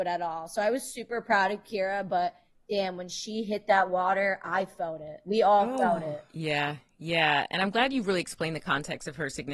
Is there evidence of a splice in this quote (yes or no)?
no